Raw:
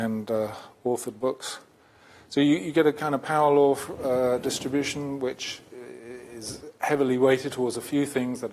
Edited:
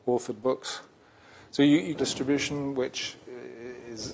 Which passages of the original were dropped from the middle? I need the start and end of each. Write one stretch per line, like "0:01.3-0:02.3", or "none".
0:02.7-0:04.4

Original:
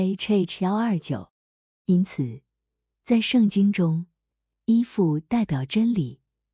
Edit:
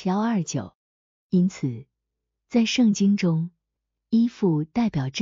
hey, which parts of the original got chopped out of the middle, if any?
none

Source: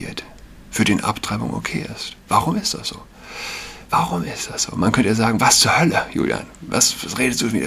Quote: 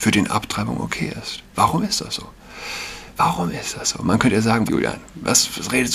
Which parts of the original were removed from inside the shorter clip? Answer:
0:05.4-0:06.1

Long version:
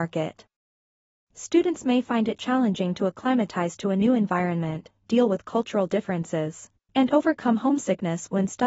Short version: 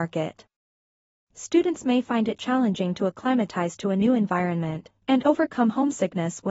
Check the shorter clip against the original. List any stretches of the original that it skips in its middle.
0:05.0-0:06.9

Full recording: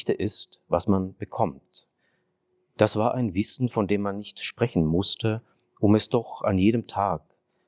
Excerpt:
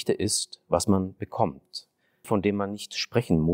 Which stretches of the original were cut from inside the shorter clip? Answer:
0:02.2-0:03.7

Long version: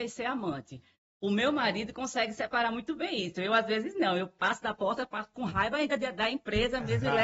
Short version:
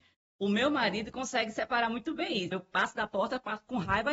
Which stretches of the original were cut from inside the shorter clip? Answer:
0:03.3-0:04.2

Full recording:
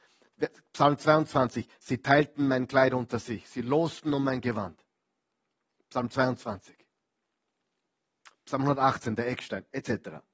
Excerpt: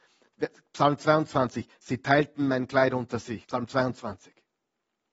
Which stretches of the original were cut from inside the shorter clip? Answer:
0:03.4-0:05.9

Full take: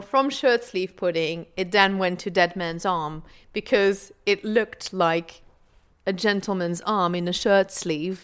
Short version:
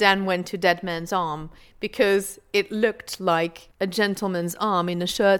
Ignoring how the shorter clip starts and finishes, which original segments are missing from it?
0:05.4-0:06.0

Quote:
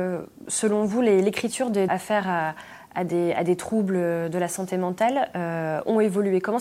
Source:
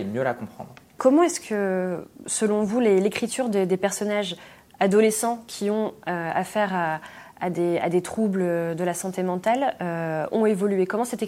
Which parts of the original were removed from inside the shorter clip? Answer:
0:03.7-0:06.3

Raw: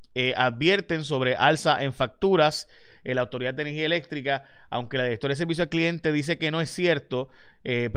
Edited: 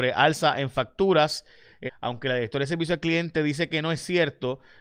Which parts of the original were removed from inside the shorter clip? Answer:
0:03.1-0:04.5

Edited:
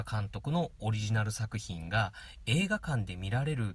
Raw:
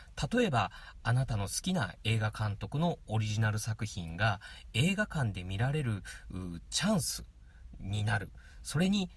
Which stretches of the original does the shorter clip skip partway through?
none

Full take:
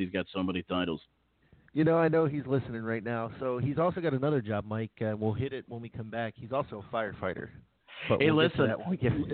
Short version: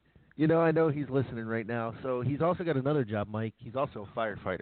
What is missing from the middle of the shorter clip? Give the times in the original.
0:04.9-0:06.3

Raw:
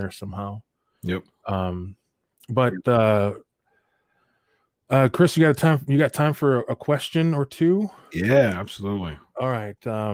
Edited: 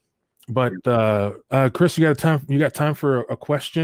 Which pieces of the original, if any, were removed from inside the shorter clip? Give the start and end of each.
0:03.4-0:04.8

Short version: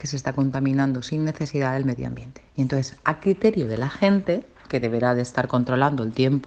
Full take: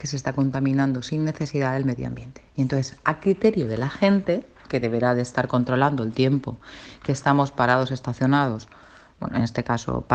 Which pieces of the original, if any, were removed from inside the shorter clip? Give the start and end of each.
none

